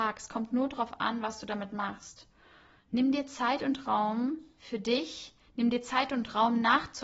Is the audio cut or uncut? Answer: uncut